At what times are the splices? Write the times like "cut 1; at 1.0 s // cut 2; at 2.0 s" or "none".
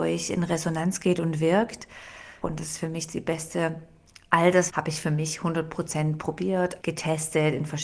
cut 1; at 2.4 s // cut 2; at 4.7 s // cut 3; at 6.8 s